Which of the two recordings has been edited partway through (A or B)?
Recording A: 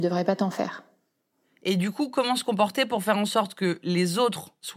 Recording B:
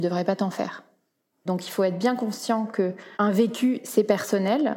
B